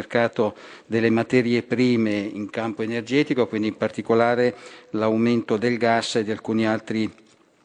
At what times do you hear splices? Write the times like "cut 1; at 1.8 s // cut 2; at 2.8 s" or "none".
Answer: none